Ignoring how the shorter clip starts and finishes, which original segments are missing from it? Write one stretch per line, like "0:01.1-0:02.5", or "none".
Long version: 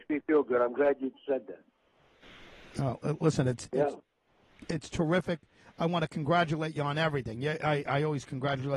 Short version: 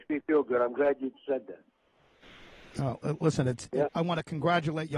0:03.9-0:05.7